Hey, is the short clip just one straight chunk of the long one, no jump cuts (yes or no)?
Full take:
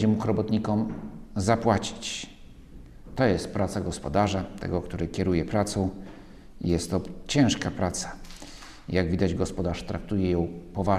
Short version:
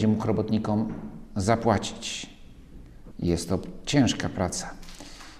no